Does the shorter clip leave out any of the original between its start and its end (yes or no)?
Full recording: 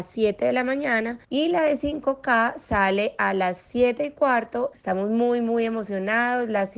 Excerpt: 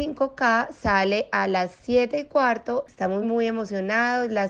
yes